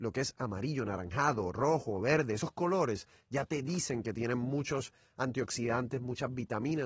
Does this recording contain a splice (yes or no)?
no